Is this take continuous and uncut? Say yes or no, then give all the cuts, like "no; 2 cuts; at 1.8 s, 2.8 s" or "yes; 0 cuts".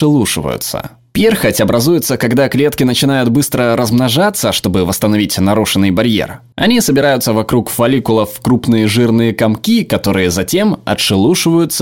no; 1 cut; at 6.5 s